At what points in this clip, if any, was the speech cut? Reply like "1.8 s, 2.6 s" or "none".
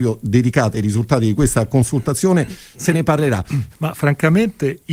3.7 s